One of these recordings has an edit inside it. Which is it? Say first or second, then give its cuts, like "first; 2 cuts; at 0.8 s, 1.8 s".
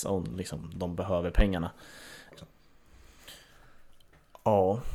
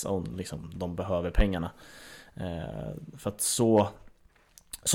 first; 1 cut; at 2.3 s